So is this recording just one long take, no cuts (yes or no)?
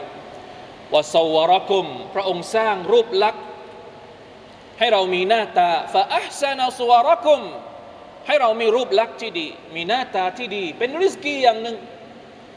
yes